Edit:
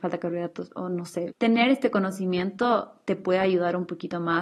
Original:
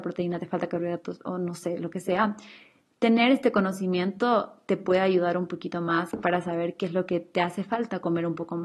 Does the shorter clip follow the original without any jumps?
no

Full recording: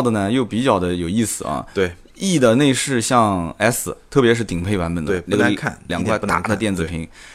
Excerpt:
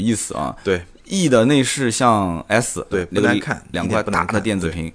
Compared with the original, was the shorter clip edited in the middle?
yes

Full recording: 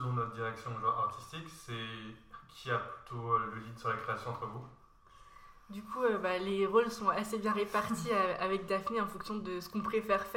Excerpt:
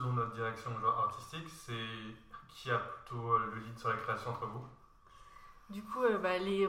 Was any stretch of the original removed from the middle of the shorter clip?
no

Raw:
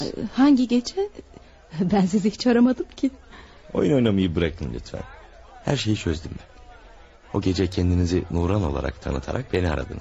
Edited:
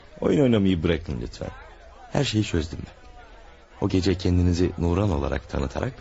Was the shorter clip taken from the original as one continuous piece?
yes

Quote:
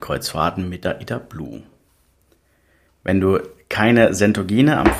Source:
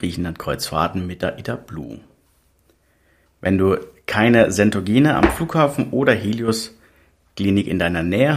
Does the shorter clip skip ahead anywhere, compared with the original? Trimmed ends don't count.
no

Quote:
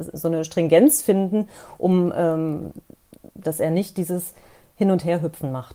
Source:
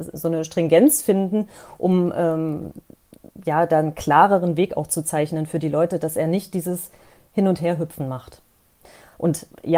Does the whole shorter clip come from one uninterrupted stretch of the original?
no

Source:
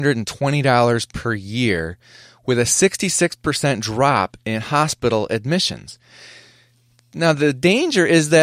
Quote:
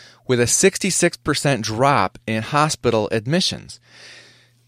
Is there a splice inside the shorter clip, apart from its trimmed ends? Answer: no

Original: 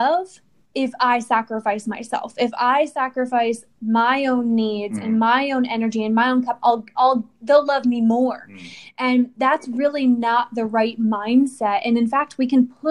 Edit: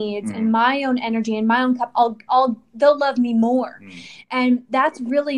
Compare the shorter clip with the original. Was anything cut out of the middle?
no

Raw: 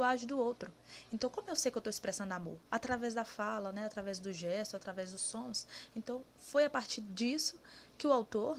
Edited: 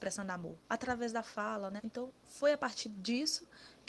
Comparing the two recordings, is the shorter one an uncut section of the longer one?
no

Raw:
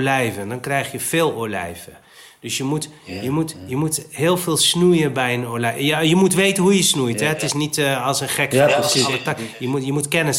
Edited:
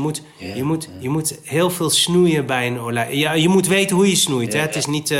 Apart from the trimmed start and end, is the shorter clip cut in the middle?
no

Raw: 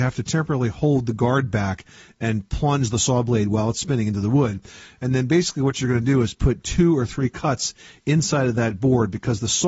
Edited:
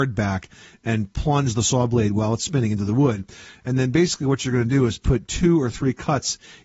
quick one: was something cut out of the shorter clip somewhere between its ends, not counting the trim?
no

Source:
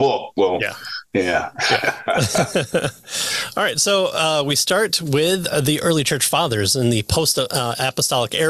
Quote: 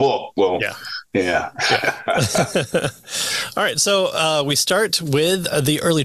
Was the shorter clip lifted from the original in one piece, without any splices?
yes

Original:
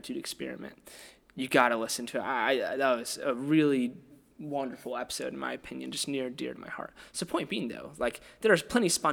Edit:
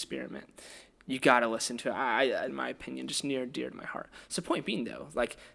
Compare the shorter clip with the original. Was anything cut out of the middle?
yes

